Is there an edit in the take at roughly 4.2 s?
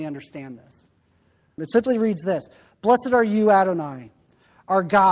no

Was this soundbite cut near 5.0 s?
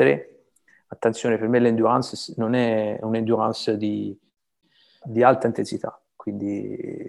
yes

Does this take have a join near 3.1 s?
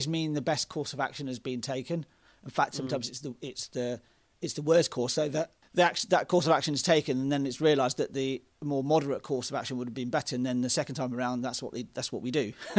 no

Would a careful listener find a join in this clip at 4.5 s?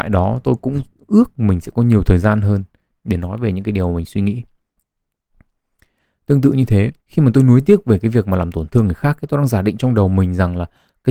no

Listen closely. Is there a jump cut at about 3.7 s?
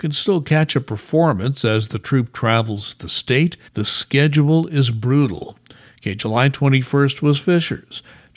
yes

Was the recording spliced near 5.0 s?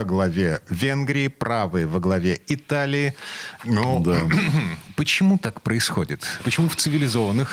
no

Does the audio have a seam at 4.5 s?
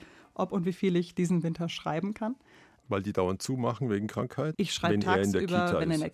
yes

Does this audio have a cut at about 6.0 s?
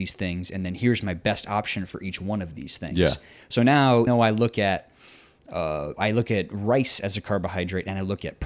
yes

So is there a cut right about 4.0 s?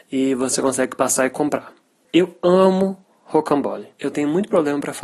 no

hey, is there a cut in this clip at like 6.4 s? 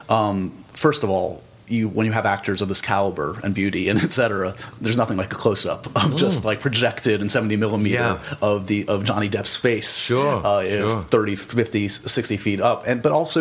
no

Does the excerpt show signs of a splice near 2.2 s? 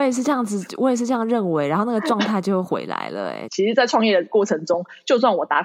no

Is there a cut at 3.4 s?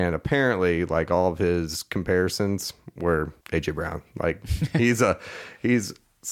yes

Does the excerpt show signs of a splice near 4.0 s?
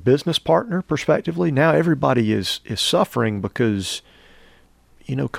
no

